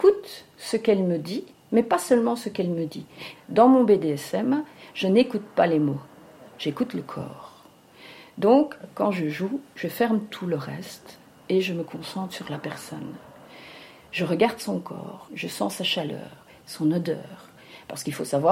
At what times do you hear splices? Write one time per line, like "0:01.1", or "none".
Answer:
0:03.4
0:15.3